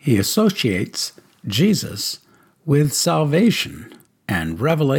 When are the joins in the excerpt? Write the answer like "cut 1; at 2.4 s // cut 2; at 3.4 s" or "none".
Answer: cut 1; at 4.1 s